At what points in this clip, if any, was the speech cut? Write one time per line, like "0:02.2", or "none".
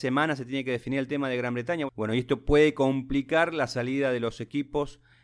0:01.9